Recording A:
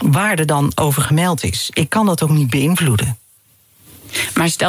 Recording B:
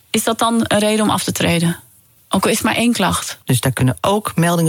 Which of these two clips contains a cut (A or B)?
B